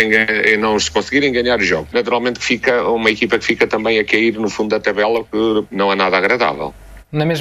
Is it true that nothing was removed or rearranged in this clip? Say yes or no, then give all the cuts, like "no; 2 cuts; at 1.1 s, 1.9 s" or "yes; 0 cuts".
no; 2 cuts; at 1.9 s, 5.7 s